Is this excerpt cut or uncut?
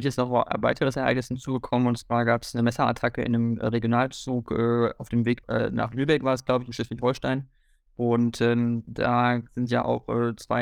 cut